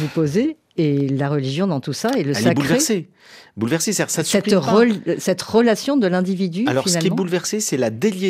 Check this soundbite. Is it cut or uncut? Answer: uncut